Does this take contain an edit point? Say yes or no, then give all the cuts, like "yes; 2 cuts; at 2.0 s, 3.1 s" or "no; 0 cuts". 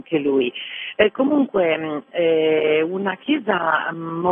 no; 0 cuts